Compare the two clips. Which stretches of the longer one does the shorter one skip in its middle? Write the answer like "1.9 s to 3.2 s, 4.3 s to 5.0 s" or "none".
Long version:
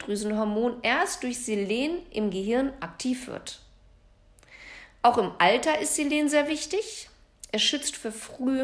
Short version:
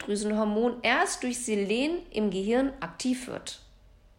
none